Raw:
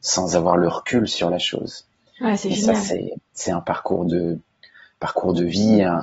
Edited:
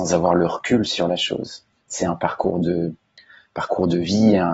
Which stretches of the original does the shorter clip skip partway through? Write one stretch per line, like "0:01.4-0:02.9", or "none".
0:02.0-0:03.3